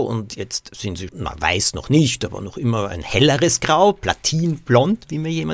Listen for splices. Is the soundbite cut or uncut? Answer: cut